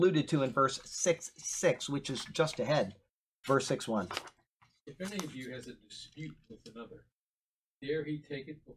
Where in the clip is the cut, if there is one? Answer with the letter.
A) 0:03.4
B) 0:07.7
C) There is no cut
A